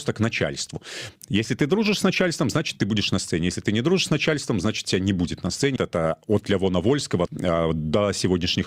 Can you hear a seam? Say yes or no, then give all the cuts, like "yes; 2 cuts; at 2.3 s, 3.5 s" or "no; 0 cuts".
yes; 2 cuts; at 5.8 s, 7.3 s